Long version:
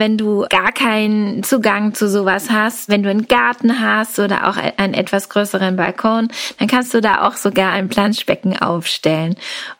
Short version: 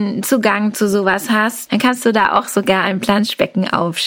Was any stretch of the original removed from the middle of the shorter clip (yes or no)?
yes